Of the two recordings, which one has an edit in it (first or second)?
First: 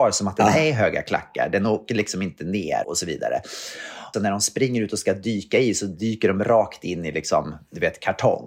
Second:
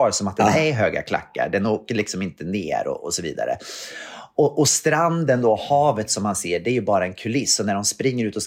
first